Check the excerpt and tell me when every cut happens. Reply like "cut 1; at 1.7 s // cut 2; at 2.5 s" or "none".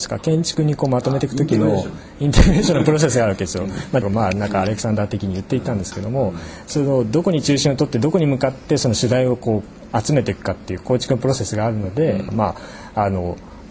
cut 1; at 4.0 s // cut 2; at 12.3 s